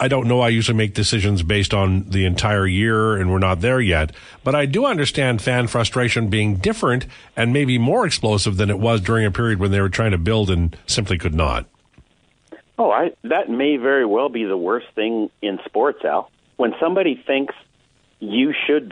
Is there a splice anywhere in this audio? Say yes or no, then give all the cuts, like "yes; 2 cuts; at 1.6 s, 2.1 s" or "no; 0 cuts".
no; 0 cuts